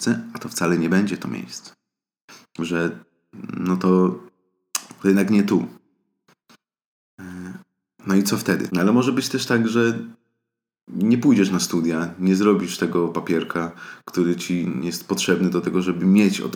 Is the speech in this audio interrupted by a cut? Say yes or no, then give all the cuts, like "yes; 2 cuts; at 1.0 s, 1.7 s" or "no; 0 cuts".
yes; 1 cut; at 8.7 s